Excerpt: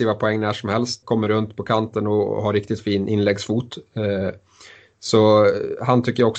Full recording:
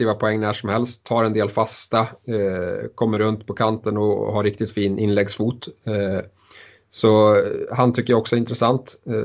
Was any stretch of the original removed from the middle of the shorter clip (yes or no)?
yes